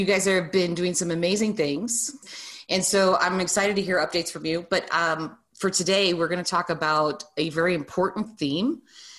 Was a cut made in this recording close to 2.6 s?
no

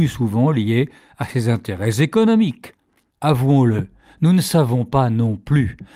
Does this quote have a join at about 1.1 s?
no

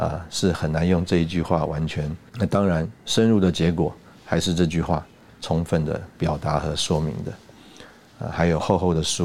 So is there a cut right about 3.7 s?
no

